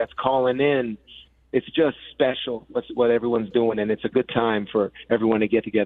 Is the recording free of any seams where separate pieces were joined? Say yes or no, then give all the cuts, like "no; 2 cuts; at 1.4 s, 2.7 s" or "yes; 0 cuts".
yes; 0 cuts